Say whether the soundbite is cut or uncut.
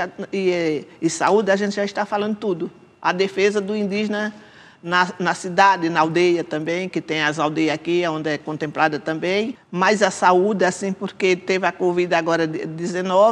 uncut